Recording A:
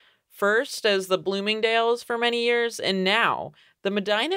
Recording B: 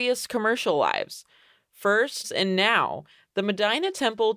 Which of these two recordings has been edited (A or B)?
B